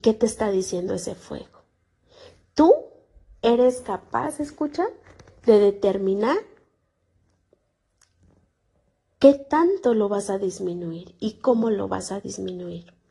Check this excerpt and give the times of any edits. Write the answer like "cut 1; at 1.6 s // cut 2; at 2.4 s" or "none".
none